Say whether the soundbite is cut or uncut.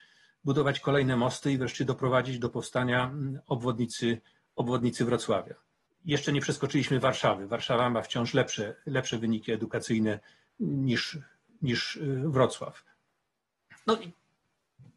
cut